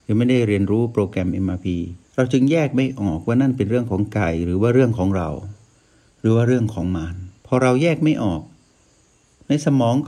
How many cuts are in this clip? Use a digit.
1